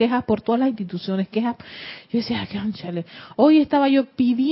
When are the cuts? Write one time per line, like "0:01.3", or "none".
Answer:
none